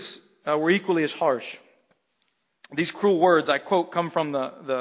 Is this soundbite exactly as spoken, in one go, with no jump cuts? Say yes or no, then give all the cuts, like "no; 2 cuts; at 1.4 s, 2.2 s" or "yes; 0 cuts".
yes; 0 cuts